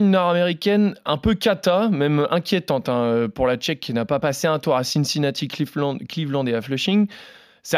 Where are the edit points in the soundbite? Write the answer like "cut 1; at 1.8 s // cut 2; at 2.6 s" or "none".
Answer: none